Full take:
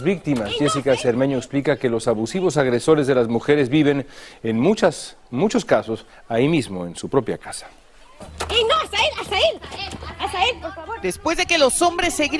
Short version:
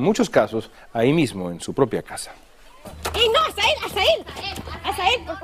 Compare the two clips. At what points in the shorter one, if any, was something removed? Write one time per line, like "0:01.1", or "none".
none